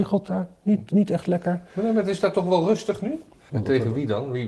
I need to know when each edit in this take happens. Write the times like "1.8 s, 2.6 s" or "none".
3.5 s